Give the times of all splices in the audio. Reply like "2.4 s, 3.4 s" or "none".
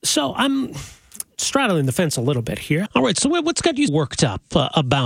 2.9 s, 3.9 s